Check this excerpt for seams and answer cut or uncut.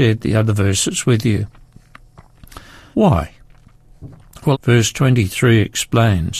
cut